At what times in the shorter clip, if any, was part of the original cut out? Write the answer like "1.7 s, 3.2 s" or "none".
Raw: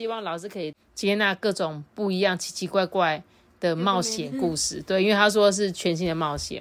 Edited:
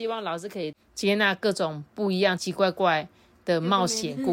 2.4 s